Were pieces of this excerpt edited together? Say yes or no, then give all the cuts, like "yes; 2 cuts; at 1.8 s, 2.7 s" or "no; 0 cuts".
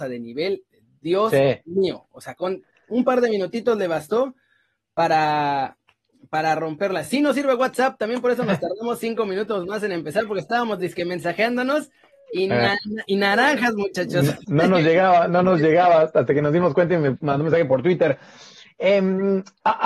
no; 0 cuts